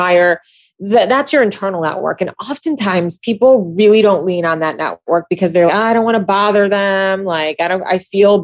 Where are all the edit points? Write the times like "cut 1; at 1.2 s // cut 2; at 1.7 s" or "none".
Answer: cut 1; at 5.7 s